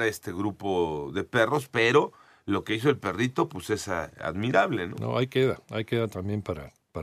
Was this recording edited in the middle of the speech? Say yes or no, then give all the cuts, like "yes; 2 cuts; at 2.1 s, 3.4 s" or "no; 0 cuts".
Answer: no; 0 cuts